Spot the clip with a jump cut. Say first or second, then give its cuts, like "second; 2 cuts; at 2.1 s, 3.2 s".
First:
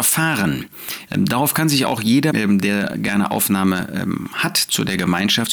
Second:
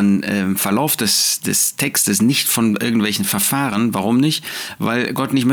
first; 2 cuts; at 1.1 s, 2.3 s